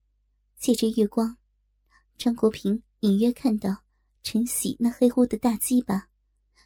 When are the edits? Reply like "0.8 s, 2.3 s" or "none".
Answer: 5.1 s